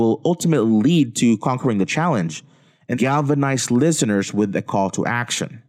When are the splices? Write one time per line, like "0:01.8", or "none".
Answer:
0:02.9